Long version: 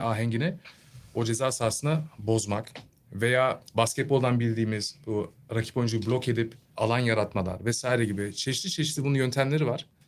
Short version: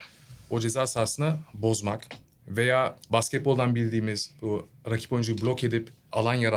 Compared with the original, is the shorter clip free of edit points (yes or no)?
yes